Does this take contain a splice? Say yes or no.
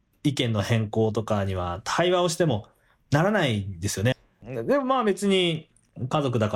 yes